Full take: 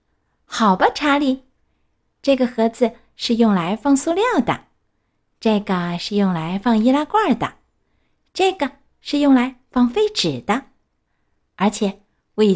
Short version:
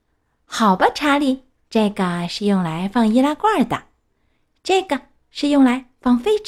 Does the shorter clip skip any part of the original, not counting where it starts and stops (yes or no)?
yes